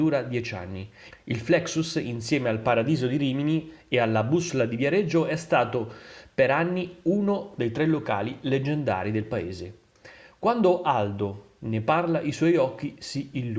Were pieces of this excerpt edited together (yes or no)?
yes